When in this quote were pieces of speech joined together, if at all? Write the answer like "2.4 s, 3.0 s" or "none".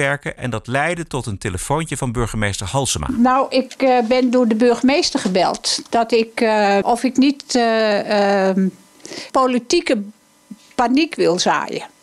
6.8 s, 9.3 s